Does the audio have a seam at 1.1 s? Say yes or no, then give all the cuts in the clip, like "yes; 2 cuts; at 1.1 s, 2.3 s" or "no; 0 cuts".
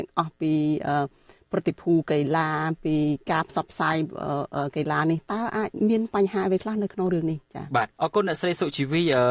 no; 1 cut; at 7.9 s